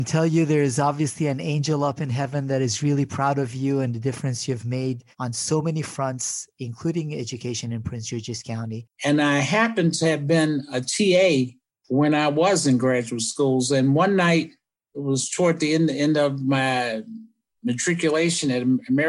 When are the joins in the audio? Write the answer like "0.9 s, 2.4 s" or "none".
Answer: 8.9 s

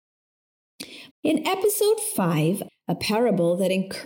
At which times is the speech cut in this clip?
1.1 s, 2.7 s

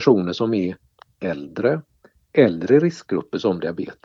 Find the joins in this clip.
none

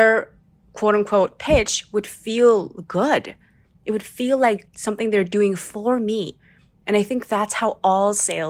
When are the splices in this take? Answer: none

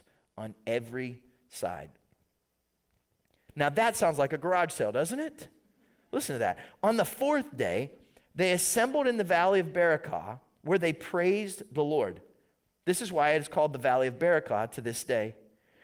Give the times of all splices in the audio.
3.5 s

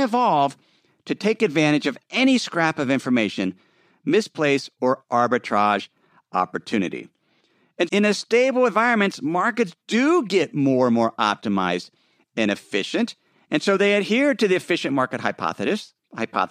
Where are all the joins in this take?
7.9 s

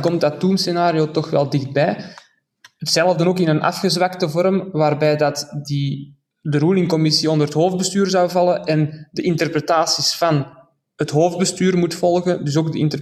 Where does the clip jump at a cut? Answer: none

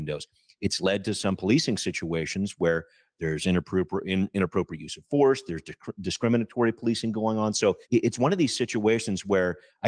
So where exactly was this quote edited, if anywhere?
7.8 s

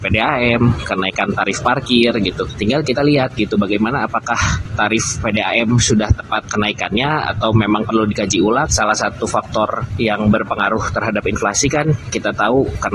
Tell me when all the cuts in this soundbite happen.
2.5 s, 8.7 s

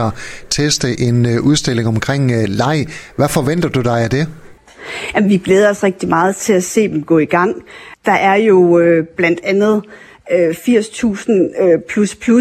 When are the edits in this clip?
none

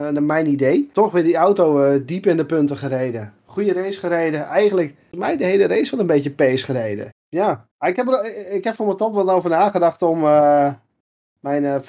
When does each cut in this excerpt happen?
7.1 s

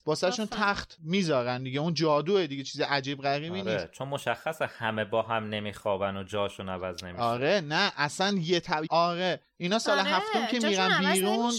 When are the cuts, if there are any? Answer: 8.9 s

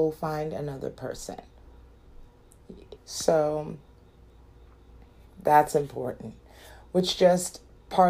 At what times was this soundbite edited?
3.0 s

